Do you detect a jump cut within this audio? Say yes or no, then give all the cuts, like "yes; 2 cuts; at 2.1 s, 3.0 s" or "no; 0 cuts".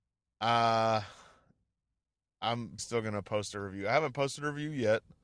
yes; 1 cut; at 2.8 s